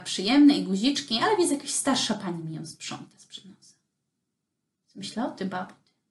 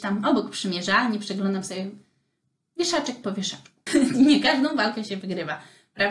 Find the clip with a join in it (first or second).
second